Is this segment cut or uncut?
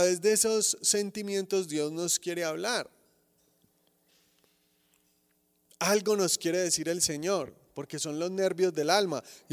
uncut